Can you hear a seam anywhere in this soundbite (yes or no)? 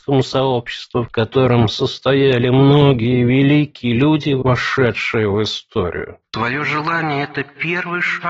no